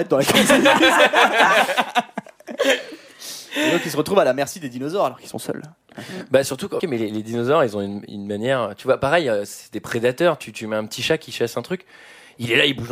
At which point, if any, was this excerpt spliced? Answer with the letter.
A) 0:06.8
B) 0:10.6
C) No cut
A